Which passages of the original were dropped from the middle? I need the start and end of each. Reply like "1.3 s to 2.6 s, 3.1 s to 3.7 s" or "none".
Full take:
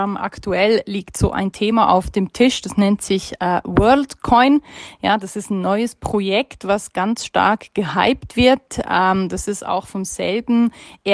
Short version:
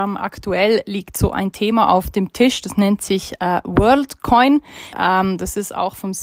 4.9 s to 8.8 s